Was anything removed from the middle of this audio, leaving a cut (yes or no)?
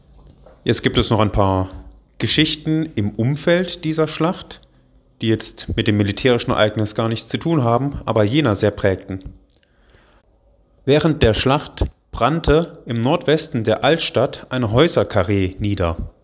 no